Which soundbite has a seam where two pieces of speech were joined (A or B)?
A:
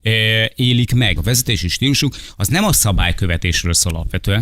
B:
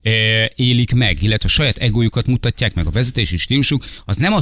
A